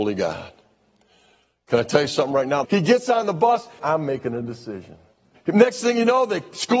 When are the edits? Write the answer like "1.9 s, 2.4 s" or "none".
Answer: 2.6 s, 3.8 s, 5.3 s